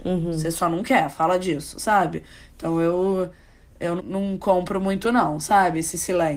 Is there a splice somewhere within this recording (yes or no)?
yes